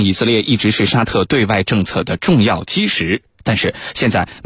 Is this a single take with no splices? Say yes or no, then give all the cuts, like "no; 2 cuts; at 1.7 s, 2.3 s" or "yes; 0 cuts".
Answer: yes; 0 cuts